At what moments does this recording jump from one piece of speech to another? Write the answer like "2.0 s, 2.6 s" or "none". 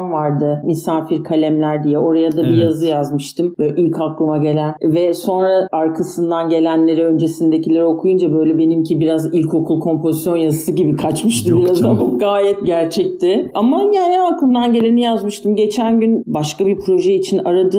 12.0 s